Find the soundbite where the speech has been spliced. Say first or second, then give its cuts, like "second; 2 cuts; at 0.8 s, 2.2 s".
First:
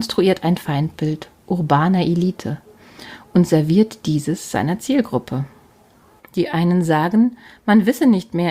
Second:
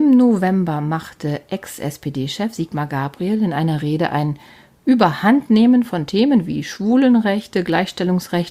first; 1 cut; at 6.2 s